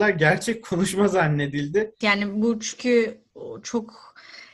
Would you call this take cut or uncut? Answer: cut